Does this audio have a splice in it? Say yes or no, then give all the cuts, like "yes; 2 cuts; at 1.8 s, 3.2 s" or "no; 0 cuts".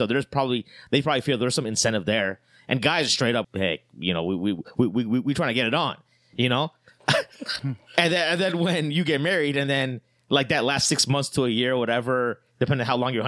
yes; 1 cut; at 3.4 s